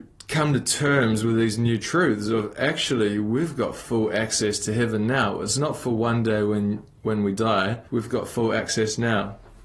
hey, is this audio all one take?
no; 1 cut; at 7.9 s

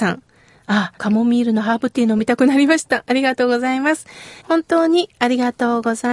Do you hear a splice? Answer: yes; 2 cuts; at 1.0 s, 4.4 s

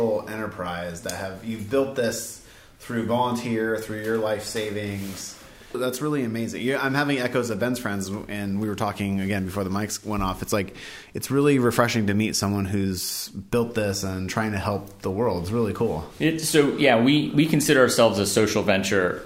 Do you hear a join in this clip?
no; 0 cuts

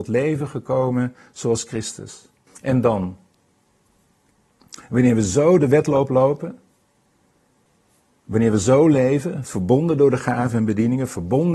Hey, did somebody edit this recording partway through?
yes; 2 cuts; at 2.5 s, 9.5 s

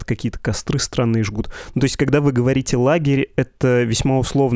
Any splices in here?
no; 0 cuts

